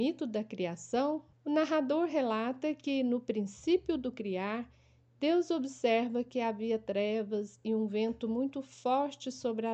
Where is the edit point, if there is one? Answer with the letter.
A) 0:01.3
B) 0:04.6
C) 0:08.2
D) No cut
A